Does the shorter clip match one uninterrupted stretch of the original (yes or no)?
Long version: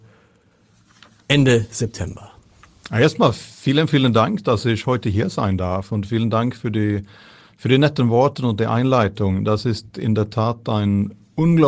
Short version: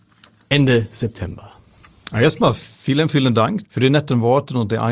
no